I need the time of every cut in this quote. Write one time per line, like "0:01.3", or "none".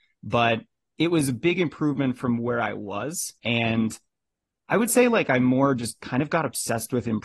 0:03.4